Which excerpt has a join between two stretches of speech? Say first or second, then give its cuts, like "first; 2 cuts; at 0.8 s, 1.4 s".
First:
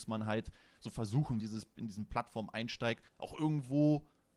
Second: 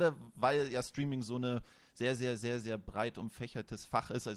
first; 2 cuts; at 1.4 s, 3.1 s